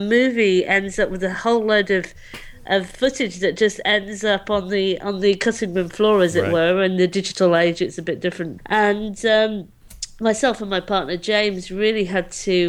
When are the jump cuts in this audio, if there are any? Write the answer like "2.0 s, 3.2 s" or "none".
8.6 s